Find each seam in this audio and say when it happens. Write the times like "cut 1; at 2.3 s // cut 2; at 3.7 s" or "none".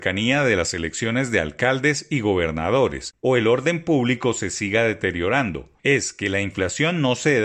none